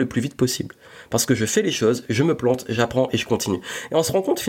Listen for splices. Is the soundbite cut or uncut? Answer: uncut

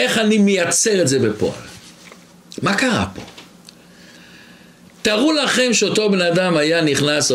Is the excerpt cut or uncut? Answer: uncut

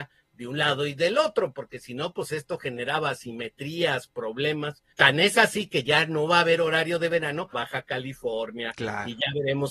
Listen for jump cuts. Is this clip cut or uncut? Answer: cut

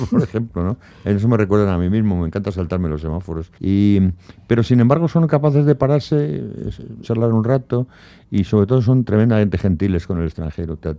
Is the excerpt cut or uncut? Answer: cut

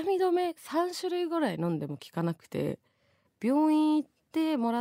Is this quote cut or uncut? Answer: uncut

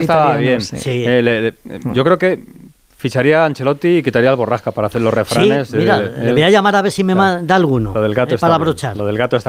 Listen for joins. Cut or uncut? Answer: uncut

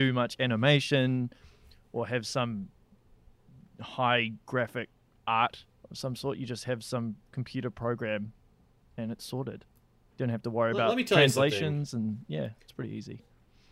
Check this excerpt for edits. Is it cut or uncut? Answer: uncut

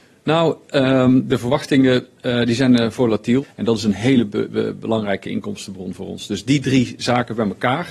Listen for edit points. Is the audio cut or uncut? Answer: cut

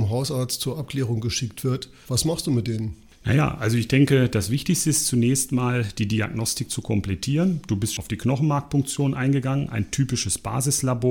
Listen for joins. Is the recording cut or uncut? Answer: cut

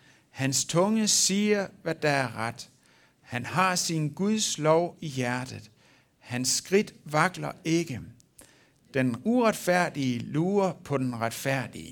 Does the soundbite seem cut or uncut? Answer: uncut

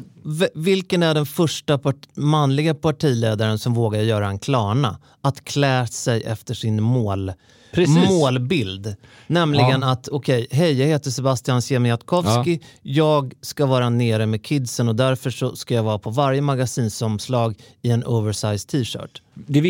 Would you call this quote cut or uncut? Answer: uncut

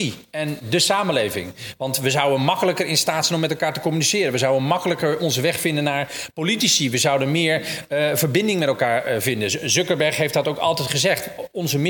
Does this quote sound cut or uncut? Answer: uncut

